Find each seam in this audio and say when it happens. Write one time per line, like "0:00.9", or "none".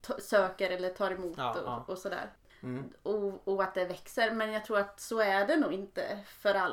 0:02.5